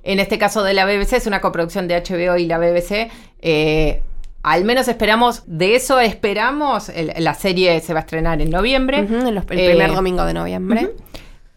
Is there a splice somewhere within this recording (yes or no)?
yes